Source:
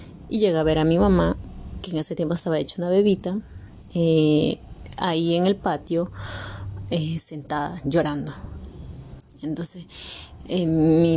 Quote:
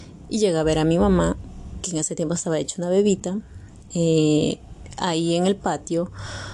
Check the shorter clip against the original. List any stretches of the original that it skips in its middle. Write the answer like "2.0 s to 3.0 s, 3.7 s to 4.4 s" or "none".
none